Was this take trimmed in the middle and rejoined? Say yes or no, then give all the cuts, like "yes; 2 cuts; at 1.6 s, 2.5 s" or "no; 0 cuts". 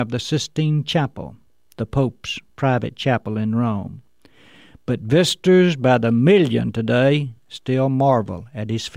no; 0 cuts